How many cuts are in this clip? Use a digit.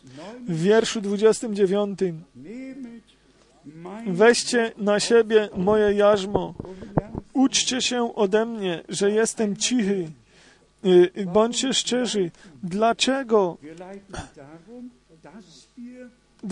0